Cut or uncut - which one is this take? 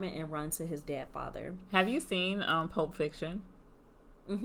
uncut